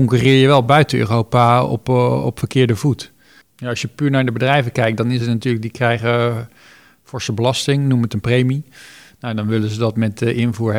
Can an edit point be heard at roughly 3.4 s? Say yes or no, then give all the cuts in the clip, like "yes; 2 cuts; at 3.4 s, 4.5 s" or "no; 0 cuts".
yes; 1 cut; at 3.4 s